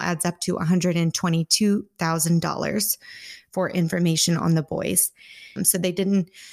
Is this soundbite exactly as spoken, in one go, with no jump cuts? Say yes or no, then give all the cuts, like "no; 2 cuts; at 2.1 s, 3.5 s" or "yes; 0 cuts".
no; 1 cut; at 5.6 s